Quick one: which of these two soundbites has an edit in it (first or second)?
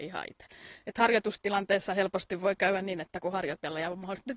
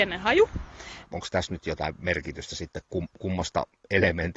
second